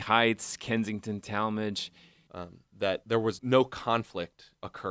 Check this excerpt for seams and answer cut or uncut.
cut